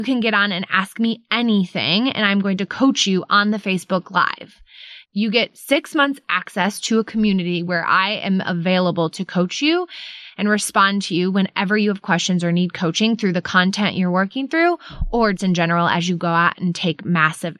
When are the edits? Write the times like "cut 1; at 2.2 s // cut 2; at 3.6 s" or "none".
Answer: cut 1; at 5.0 s // cut 2; at 15.4 s